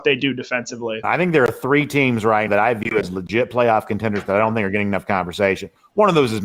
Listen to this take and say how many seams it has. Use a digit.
2